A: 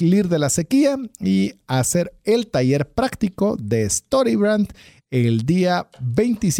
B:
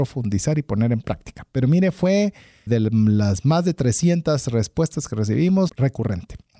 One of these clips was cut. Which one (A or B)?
B